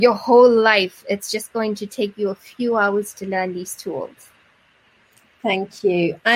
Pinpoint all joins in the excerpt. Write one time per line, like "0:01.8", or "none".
none